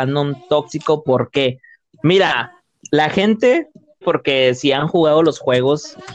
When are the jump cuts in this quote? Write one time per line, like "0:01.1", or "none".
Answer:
0:01.9
0:04.0